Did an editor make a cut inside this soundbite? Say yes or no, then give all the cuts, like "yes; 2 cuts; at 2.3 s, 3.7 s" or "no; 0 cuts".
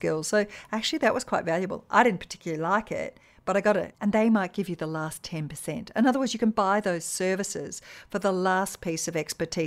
yes; 1 cut; at 3.9 s